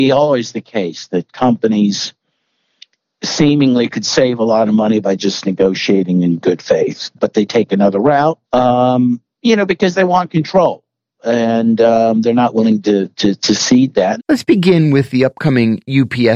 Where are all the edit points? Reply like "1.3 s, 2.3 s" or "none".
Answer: 7.1 s, 8.4 s, 14.2 s